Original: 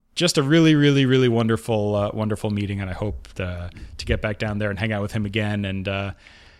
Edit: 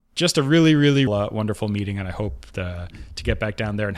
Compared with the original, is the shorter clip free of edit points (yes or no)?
no